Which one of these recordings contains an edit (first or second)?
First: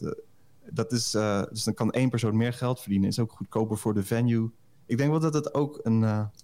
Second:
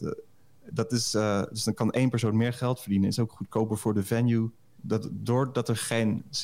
second